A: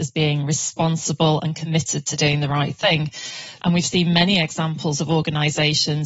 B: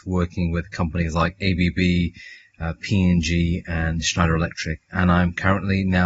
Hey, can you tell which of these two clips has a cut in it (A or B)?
A